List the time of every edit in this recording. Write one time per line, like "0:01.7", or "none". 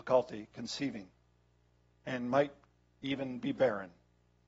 none